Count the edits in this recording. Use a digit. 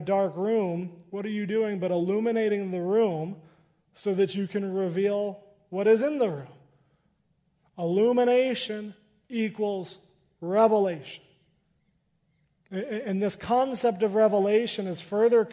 0